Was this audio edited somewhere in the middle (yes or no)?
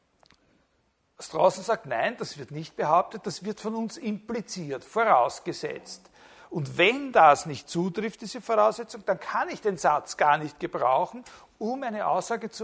no